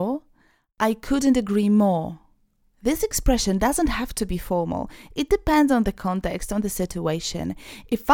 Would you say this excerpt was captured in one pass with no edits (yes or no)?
yes